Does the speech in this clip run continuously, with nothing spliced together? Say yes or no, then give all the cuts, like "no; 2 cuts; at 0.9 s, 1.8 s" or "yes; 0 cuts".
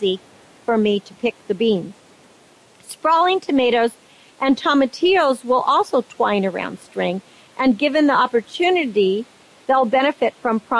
yes; 0 cuts